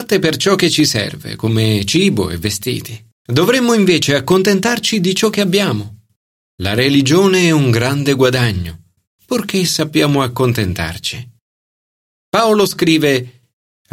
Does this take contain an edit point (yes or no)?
yes